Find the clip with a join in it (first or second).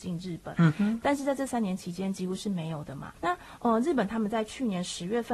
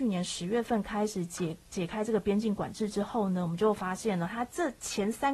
first